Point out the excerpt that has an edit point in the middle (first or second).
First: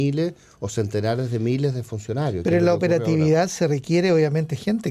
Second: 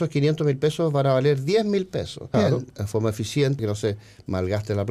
second